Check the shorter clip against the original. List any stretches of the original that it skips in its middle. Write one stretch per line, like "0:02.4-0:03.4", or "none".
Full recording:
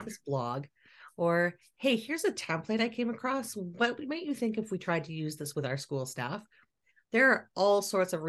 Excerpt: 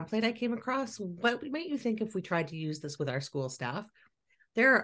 none